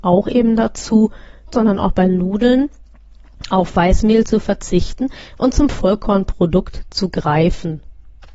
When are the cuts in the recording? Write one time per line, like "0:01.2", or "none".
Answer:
0:01.5